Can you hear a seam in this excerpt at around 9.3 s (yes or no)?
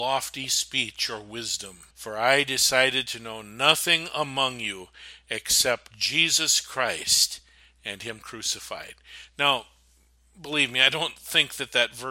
no